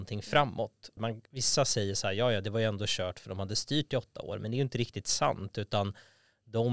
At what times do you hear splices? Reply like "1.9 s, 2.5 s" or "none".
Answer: 1.0 s